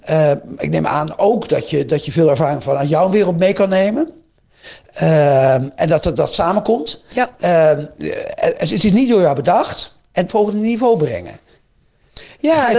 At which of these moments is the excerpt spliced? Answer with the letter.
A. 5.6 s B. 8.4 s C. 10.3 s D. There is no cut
C